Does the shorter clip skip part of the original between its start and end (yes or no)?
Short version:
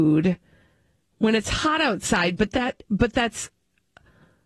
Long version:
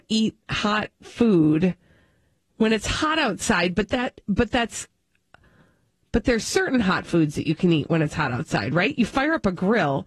no